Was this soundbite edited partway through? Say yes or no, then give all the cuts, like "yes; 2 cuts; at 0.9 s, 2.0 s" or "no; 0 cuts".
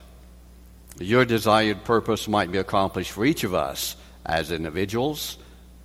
yes; 1 cut; at 0.9 s